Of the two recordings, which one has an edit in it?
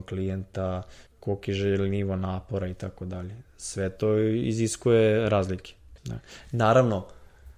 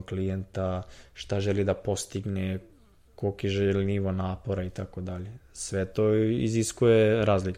first; 2 cuts; at 1.1 s, 6.0 s

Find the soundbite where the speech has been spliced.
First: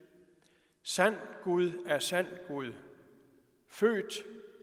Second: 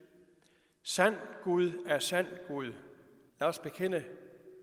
second; 1 cut; at 3.3 s

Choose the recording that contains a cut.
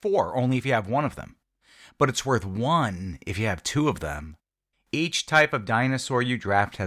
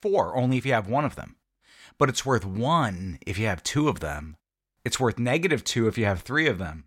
first; 1 cut; at 4.7 s

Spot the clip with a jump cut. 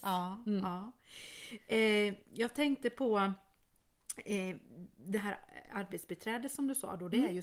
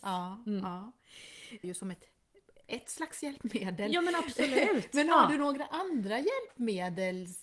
second; 1 cut; at 1.6 s

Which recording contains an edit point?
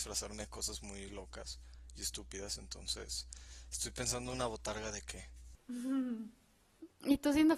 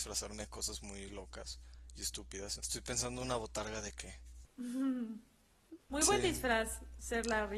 second; 2 cuts; at 2.6 s, 5.8 s

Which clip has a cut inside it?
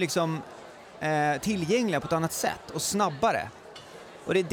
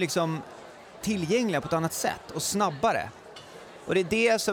second; 1 cut; at 1.0 s

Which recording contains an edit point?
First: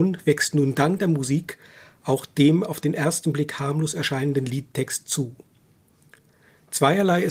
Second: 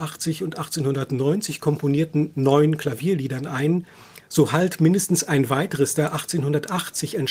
second; 1 cut; at 4.2 s

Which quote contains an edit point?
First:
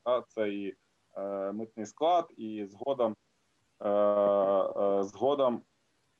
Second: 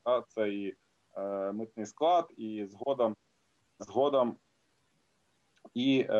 second; 1 cut; at 3.8 s

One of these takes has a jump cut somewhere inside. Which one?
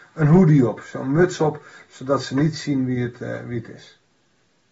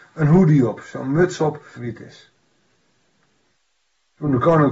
second; 1 cut; at 1.8 s

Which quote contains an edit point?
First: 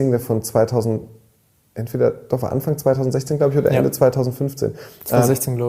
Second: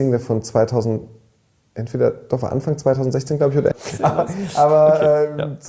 second; 1 cut; at 3.7 s

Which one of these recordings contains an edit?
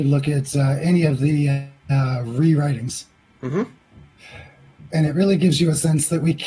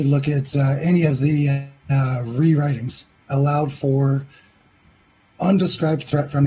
second; 1 cut; at 3.2 s

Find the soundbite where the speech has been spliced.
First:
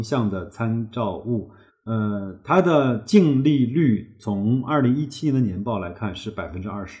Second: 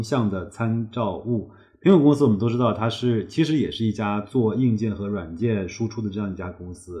first; 1 cut; at 1.7 s

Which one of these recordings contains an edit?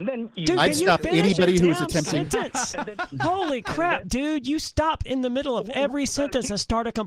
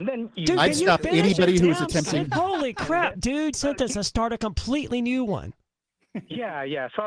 second; 2 cuts; at 2.3 s, 3.5 s

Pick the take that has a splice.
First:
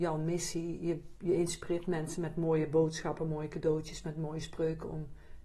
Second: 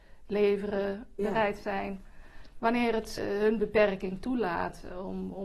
second; 2 cuts; at 1.2 s, 3.2 s

